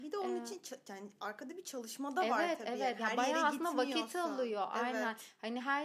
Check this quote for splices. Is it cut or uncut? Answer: uncut